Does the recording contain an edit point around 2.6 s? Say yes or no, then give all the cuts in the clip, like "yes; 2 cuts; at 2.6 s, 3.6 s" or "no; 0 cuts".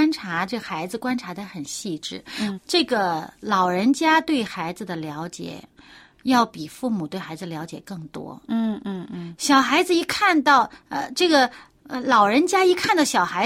yes; 1 cut; at 2.6 s